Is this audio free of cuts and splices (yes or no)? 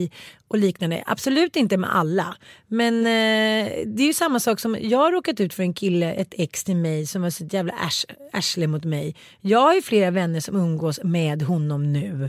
yes